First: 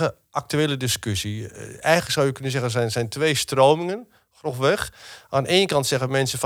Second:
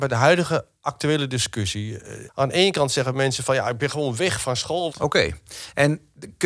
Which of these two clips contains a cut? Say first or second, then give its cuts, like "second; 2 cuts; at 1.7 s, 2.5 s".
second; 2 cuts; at 2.3 s, 4.9 s